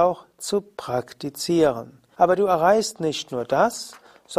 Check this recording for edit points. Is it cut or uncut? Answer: cut